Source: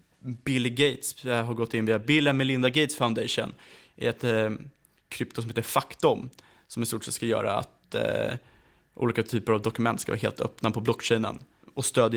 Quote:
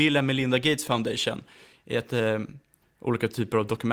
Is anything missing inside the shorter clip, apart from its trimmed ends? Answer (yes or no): yes